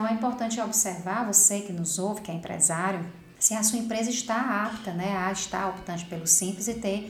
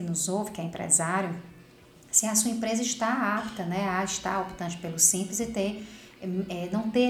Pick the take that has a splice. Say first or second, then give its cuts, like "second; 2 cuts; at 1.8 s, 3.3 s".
first; 1 cut; at 3.4 s